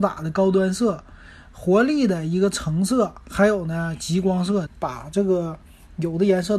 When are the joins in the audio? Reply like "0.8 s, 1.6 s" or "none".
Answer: 4.7 s